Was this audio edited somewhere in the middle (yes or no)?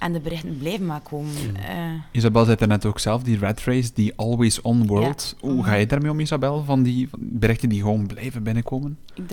no